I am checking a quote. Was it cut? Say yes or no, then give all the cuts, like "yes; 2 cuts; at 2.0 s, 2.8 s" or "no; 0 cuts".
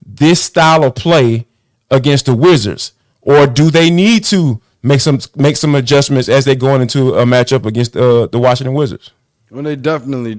no; 0 cuts